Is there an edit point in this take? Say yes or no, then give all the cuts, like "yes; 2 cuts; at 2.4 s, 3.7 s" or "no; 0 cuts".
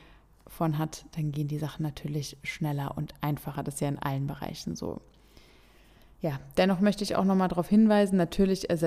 no; 0 cuts